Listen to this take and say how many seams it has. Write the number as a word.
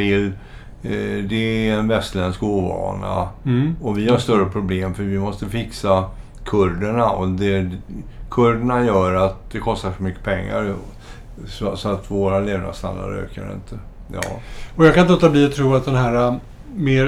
zero